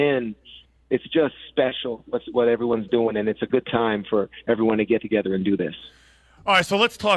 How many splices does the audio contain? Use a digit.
0